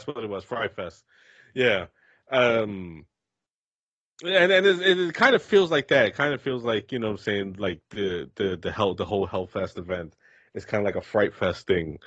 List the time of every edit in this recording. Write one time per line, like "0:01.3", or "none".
none